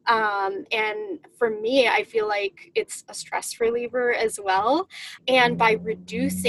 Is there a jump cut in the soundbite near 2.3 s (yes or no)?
no